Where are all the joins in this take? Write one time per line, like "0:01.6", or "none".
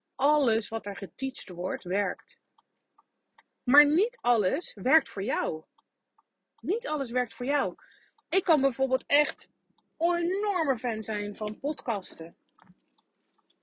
none